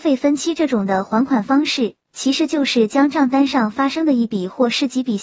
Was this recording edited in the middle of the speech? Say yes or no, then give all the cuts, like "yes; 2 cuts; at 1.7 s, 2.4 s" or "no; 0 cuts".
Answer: no; 0 cuts